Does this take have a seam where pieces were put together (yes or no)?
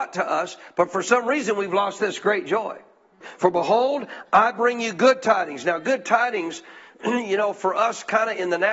yes